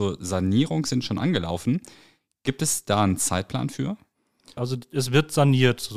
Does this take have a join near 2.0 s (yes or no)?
no